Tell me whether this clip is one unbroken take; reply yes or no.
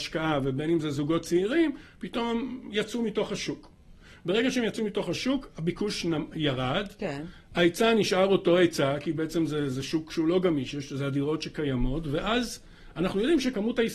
yes